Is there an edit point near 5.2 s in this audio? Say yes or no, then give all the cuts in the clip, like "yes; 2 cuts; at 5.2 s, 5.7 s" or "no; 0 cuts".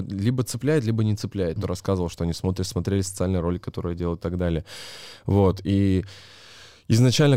no; 1 cut; at 1.6 s